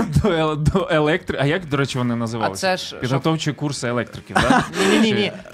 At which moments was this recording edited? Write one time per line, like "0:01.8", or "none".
none